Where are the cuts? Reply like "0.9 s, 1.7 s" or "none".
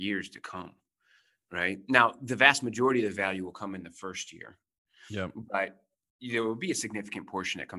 none